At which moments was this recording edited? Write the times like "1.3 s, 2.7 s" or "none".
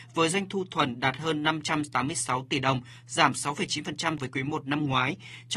4.2 s